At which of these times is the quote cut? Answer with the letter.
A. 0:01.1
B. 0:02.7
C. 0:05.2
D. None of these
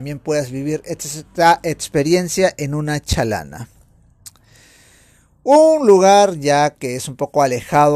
D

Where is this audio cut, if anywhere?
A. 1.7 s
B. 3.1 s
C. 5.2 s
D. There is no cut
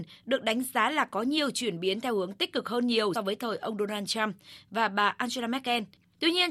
B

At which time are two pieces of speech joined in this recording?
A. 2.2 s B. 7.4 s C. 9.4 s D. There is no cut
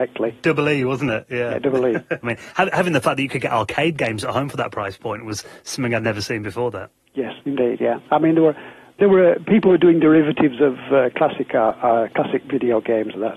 A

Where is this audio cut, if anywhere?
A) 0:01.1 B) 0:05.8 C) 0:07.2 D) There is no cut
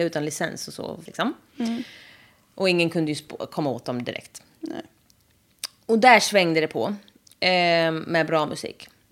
A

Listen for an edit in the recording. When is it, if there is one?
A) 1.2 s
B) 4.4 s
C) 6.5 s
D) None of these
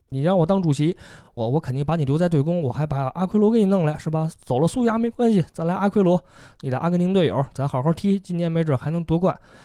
D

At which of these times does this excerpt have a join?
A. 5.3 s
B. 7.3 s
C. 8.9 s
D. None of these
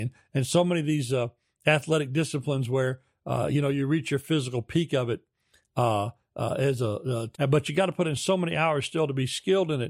B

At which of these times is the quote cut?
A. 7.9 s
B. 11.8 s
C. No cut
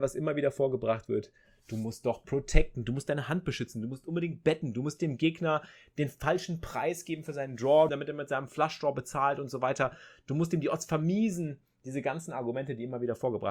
A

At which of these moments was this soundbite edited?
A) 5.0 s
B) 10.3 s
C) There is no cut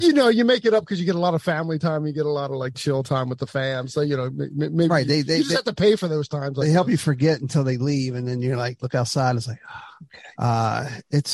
B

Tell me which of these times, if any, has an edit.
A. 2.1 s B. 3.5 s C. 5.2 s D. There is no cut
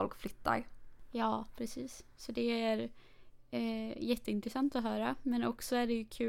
D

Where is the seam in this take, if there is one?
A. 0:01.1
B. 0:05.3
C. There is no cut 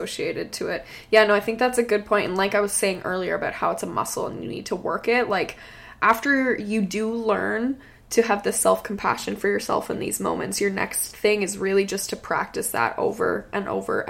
C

